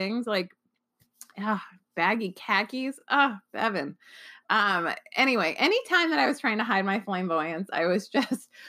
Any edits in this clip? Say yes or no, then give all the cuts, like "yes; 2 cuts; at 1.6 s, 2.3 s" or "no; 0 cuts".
no; 0 cuts